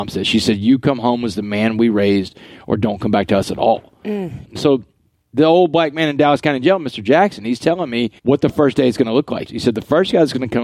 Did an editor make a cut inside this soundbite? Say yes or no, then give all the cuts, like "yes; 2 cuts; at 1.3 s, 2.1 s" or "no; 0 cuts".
yes; 3 cuts; at 4.4 s, 8.2 s, 9.5 s